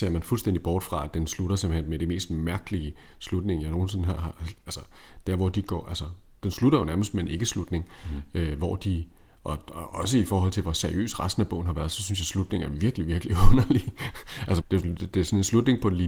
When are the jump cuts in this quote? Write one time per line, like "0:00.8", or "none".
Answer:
0:14.6